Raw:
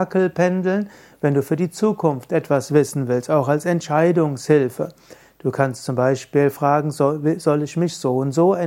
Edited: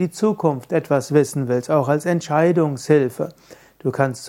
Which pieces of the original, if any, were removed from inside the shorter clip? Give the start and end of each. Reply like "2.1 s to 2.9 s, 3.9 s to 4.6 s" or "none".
none